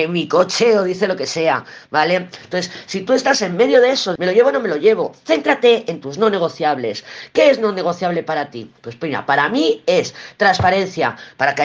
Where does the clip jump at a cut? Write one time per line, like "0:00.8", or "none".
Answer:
0:04.2